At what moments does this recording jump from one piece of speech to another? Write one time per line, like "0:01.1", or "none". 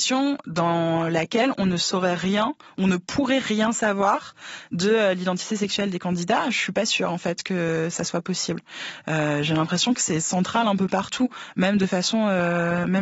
none